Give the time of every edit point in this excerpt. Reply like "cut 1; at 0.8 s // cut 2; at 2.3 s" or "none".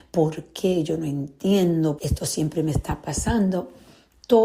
cut 1; at 2.0 s